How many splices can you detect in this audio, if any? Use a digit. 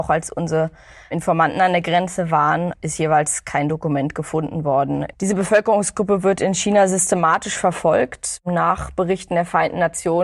1